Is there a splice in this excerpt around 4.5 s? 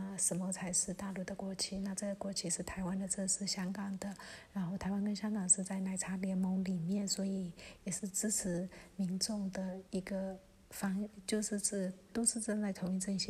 no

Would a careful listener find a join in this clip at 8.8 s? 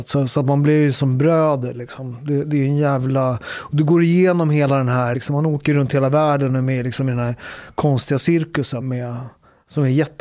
yes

